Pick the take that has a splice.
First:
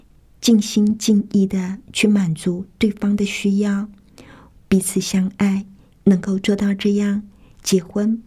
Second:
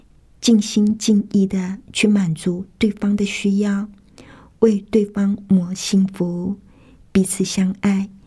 first; 2 cuts; at 4.5 s, 5.9 s

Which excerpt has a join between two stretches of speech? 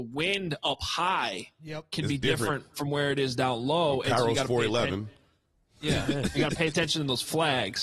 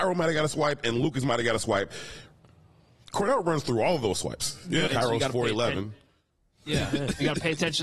second; 1 cut; at 4.9 s

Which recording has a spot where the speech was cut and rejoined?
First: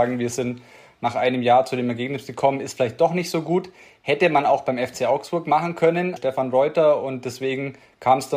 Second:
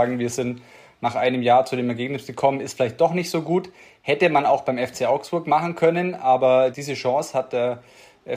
first; 1 cut; at 6.2 s

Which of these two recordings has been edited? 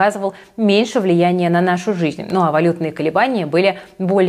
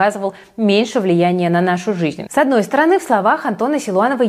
second; 1 cut; at 2.3 s

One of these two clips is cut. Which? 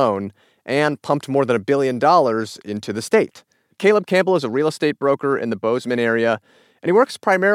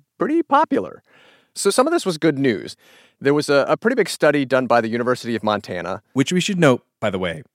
first; 1 cut; at 3.7 s

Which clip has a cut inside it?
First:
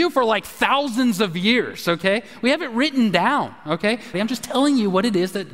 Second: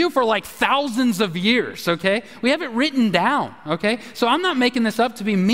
first; 1 cut; at 4.1 s

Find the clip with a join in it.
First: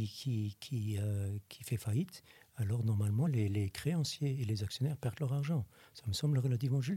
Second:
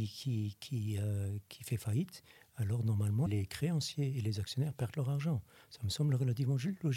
second; 1 cut; at 3.3 s

